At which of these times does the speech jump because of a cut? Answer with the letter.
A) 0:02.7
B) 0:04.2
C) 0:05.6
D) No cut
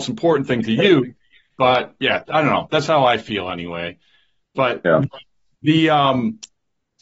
D